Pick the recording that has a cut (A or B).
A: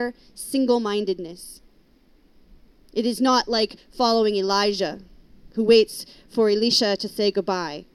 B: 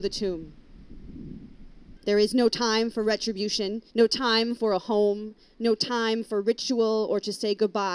B